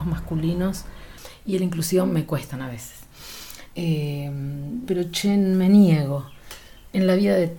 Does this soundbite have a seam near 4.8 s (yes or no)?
yes